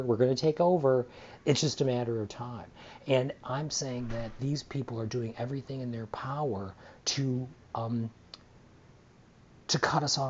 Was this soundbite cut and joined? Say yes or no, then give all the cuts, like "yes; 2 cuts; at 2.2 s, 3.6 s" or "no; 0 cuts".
no; 0 cuts